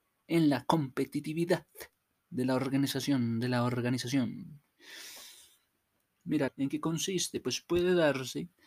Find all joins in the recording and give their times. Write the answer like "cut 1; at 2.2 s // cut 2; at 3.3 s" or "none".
cut 1; at 6.5 s